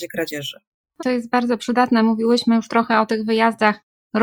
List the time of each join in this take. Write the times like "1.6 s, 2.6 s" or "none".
1.0 s